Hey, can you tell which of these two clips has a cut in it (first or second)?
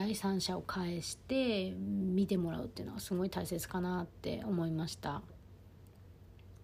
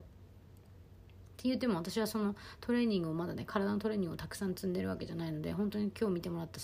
first